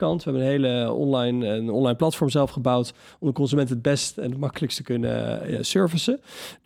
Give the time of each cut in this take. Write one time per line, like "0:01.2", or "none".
0:05.4